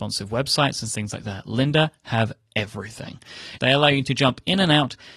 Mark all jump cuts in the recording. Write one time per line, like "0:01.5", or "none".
0:03.6